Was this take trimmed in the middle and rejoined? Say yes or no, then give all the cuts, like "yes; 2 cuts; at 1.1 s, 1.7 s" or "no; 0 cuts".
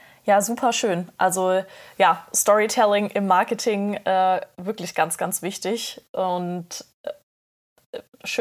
no; 0 cuts